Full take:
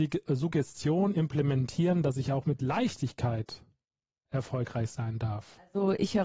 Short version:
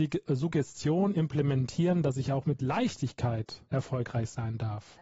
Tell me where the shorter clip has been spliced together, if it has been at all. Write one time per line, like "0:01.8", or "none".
0:03.7